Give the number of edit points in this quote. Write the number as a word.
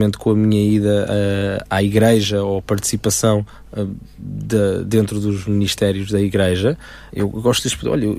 one